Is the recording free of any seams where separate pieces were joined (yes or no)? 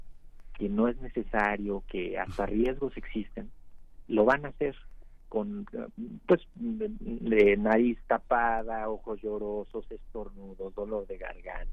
no